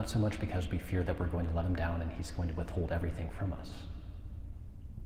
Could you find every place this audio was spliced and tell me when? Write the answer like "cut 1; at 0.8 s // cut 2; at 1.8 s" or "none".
none